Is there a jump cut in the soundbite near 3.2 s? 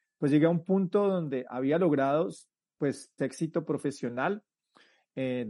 yes; 1 cut; at 3.2 s

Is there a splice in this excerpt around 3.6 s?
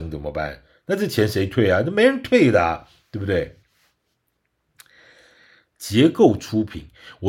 no; 0 cuts

